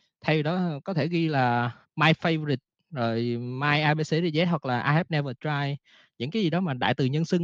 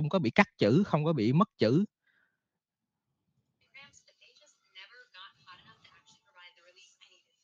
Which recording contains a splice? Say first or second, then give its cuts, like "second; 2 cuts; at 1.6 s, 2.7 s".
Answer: first; 1 cut; at 1.8 s